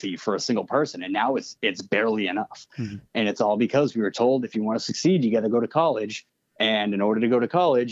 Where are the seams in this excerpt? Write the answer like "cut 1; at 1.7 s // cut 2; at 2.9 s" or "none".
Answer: none